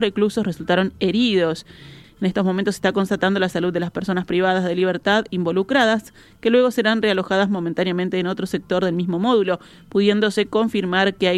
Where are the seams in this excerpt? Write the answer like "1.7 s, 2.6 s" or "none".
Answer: 2.0 s